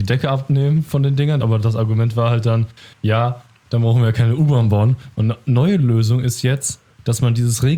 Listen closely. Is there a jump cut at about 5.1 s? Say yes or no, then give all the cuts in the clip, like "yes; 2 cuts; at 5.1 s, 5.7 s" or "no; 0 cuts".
yes; 2 cuts; at 1.4 s, 5.1 s